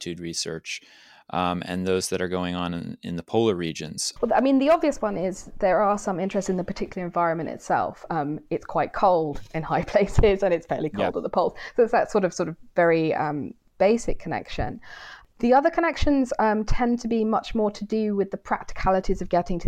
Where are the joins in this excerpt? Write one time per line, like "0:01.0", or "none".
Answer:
0:04.2